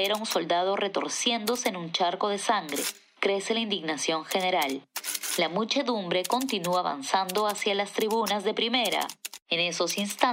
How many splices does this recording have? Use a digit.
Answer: 0